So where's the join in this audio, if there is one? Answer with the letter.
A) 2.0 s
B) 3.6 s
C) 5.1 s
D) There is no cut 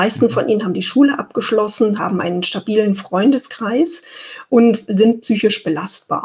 A